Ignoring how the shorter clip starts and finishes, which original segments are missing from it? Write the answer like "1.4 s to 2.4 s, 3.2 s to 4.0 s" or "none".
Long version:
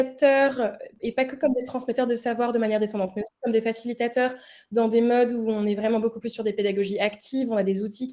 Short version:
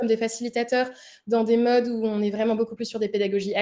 none